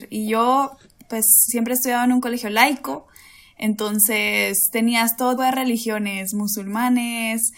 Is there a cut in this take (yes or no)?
yes